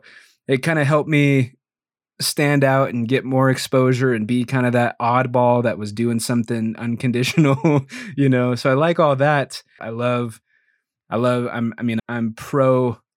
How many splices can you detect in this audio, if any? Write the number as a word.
two